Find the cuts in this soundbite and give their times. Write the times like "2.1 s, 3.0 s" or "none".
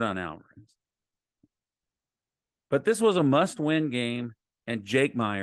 none